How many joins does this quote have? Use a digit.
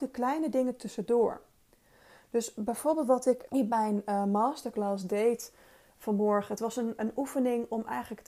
2